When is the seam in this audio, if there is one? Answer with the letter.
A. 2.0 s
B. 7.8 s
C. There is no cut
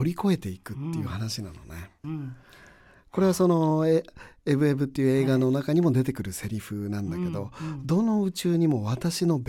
A